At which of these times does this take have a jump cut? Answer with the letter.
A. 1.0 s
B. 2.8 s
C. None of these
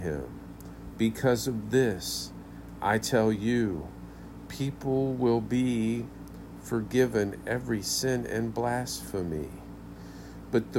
A